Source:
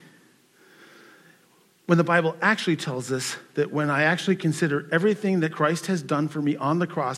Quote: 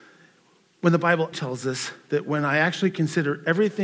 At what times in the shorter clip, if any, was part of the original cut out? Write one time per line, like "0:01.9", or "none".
0:01.3